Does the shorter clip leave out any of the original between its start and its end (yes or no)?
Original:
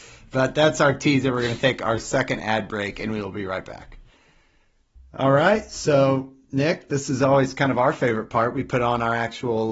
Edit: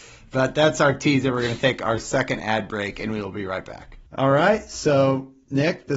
yes